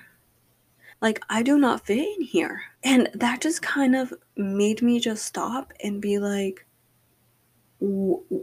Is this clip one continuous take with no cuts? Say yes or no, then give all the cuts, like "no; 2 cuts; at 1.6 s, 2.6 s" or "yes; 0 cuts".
no; 2 cuts; at 0.9 s, 2.8 s